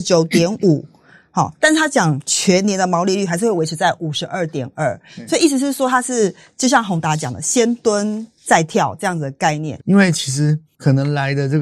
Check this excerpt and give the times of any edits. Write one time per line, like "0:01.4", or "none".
0:09.8